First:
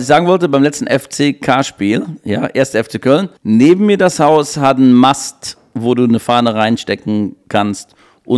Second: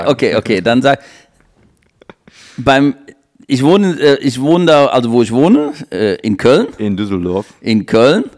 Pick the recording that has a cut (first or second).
first